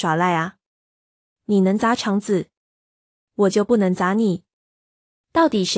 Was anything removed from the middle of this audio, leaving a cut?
no; 0 cuts

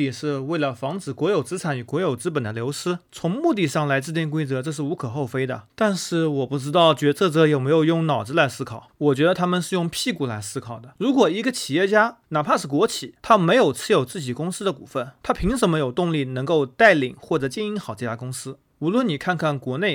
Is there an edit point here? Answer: no; 0 cuts

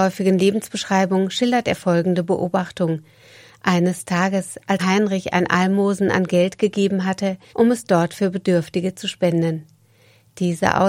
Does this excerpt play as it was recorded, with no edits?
no; 2 cuts; at 4.8 s, 7.5 s

